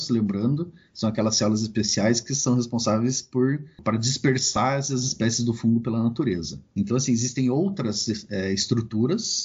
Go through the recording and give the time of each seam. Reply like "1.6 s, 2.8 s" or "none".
none